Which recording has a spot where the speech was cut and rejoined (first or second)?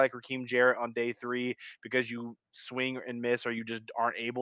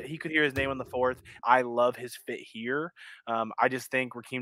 second